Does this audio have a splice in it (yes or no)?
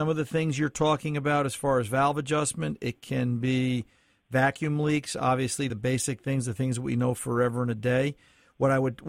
no